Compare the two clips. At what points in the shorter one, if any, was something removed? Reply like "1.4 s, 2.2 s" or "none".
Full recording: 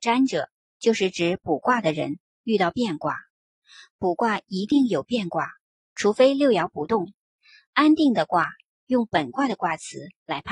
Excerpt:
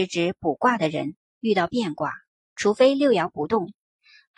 2.3 s